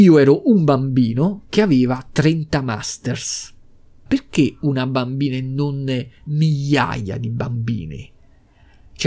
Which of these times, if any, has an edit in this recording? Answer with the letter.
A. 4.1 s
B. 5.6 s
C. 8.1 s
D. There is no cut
A